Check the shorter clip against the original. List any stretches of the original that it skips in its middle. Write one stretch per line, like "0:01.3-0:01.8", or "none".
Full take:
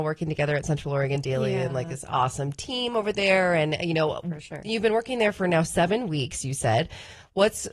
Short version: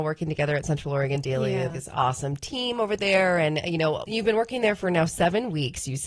0:01.7-0:01.9
0:04.2-0:04.6